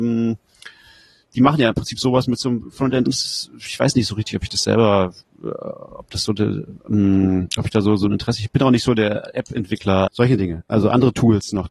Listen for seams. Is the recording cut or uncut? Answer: cut